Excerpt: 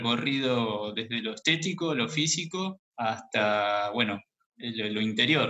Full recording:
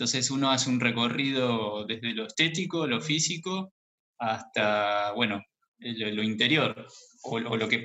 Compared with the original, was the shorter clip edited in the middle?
yes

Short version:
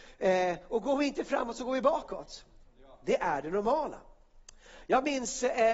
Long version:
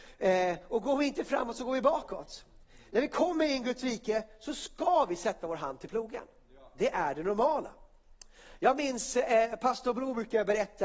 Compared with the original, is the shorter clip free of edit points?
no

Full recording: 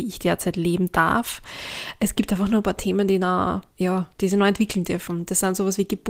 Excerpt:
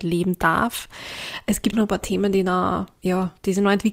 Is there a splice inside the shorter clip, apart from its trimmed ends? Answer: yes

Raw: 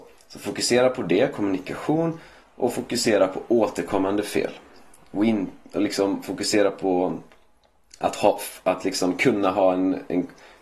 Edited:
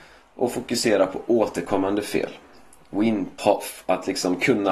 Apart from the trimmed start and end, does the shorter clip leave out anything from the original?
yes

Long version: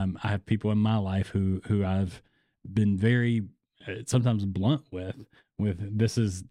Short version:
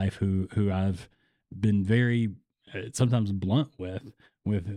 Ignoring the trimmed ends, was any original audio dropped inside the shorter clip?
no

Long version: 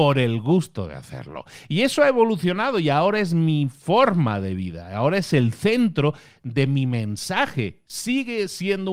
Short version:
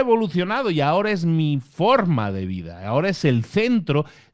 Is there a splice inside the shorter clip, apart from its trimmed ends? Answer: no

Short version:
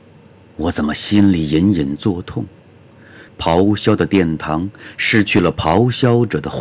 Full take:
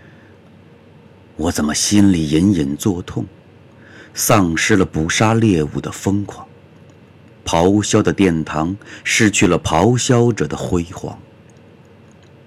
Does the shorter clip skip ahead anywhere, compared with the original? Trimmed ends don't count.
yes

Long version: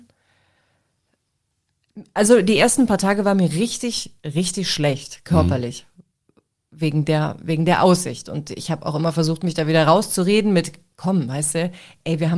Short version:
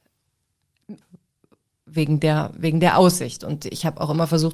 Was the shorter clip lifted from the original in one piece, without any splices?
no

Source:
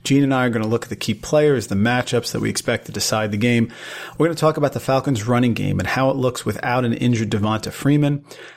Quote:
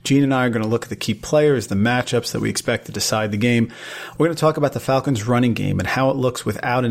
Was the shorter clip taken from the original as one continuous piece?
yes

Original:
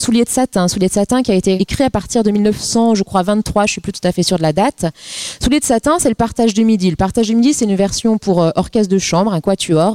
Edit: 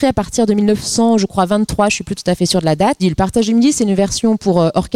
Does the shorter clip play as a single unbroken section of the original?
no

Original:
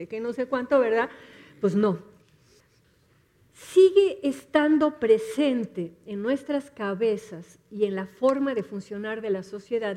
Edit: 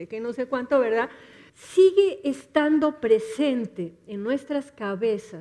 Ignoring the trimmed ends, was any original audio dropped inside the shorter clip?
yes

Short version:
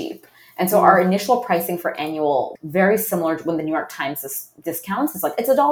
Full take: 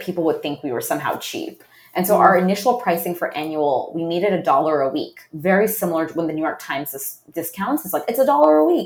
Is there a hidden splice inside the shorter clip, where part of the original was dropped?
yes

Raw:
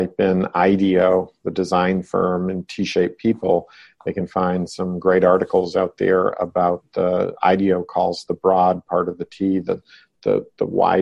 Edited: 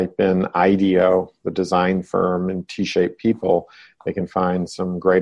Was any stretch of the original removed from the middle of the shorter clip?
no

